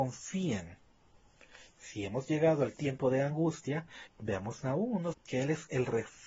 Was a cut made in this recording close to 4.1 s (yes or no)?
yes